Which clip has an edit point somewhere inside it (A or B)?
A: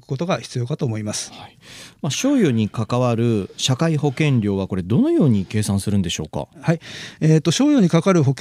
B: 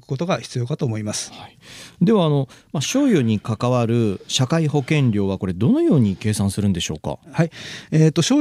A